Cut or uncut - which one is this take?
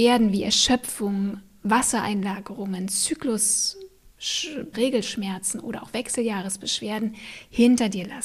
cut